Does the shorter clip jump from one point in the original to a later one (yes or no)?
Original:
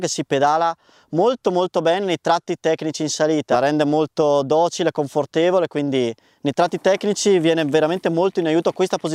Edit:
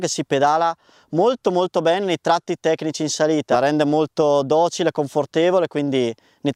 no